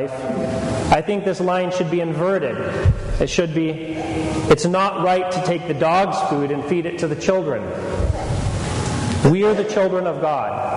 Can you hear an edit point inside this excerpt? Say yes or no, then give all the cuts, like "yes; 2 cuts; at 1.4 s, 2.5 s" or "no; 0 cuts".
no; 0 cuts